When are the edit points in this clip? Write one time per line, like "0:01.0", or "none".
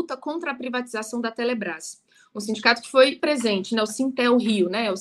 0:03.2